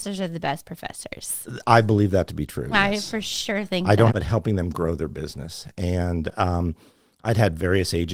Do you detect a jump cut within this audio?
yes; 1 cut; at 4.1 s

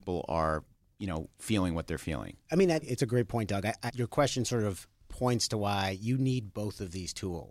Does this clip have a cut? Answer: yes; 2 cuts; at 2.8 s, 3.9 s

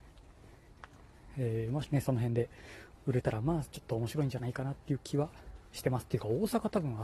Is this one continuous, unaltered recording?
no; 1 cut; at 1.8 s

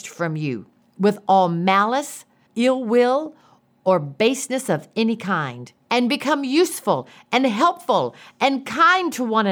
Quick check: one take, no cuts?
no; 2 cuts; at 2.5 s, 5.8 s

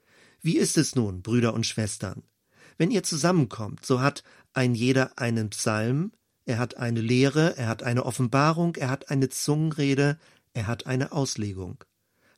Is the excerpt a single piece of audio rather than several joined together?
yes; 0 cuts

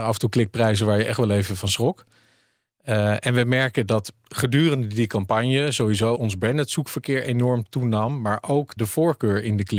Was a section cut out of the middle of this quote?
yes; 2 cuts; at 6.1 s, 8.8 s

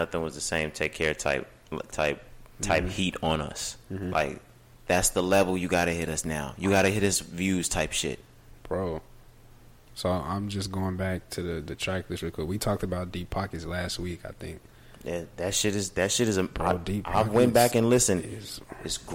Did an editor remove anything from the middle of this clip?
no; 0 cuts

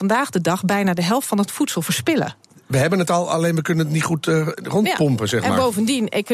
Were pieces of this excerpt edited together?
no; 0 cuts

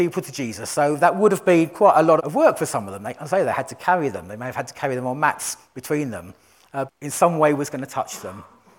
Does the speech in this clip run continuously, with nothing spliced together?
no; 2 cuts; at 2.2 s, 6.9 s

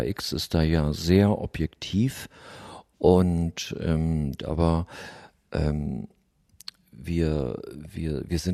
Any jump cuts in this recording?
yes; 1 cut; at 4.4 s

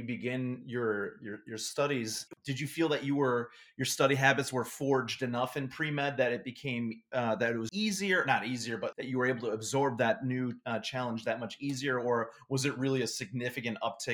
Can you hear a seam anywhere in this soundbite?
yes; 2 cuts; at 7.7 s, 8.9 s

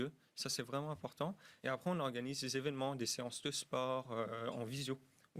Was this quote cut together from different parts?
no; 0 cuts

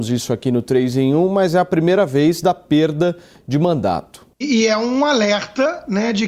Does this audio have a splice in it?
yes; 1 cut; at 4.3 s

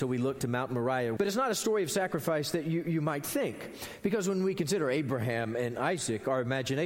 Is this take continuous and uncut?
no; 1 cut; at 1.2 s

